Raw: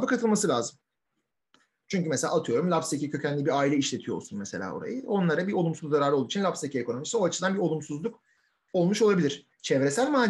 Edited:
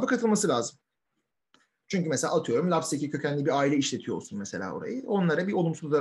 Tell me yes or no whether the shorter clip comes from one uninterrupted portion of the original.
yes